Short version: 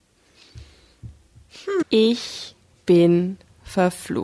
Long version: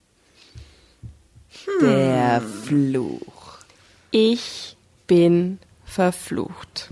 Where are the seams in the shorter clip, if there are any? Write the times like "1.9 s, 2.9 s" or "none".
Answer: 1.8 s